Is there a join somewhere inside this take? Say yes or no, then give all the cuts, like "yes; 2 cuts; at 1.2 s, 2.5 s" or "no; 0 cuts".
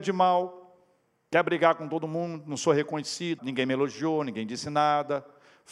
yes; 1 cut; at 3.4 s